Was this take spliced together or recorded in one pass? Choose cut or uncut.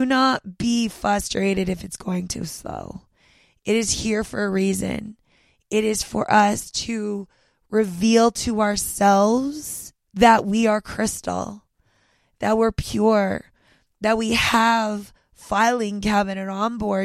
uncut